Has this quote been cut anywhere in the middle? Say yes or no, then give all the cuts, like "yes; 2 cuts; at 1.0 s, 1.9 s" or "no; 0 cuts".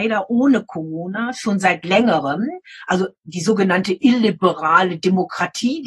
no; 0 cuts